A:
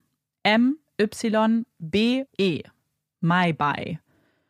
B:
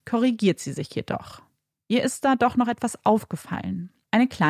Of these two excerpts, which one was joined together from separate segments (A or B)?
A